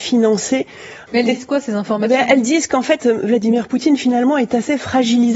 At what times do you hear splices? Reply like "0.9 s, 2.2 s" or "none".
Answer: 1.1 s